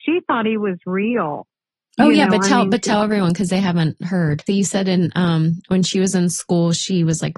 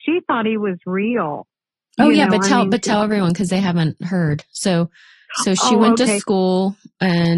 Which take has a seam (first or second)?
first